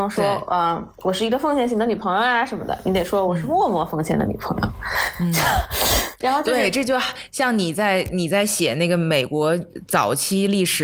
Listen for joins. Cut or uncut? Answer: uncut